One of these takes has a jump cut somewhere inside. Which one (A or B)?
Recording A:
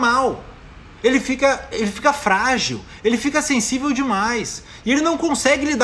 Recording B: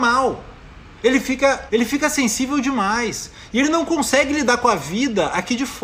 B